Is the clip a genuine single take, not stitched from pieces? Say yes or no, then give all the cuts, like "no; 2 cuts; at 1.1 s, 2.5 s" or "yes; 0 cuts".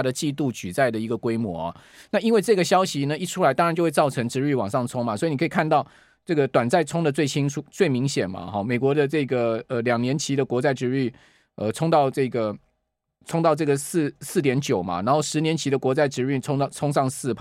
yes; 0 cuts